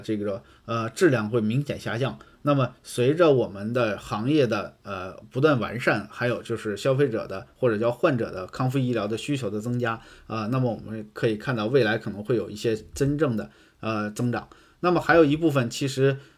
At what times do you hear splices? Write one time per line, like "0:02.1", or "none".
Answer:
none